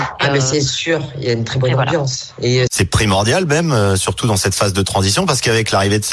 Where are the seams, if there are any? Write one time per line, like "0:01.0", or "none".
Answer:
0:02.7